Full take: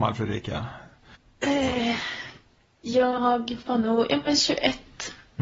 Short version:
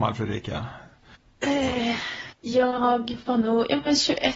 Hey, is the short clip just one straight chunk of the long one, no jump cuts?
no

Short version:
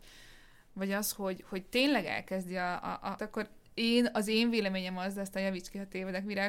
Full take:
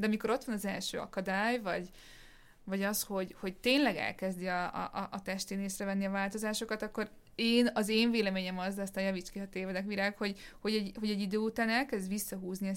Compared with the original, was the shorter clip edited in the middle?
yes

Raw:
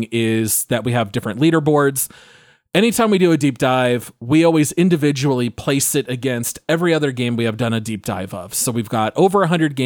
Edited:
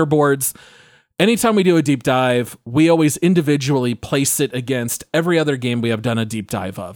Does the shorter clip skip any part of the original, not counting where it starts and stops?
no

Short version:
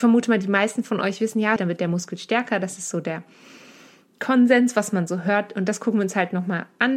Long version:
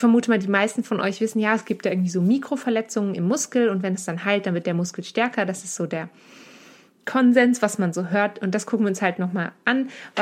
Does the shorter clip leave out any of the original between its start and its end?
yes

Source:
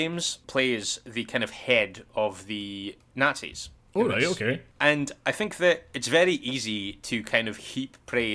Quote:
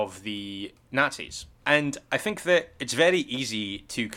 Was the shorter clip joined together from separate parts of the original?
yes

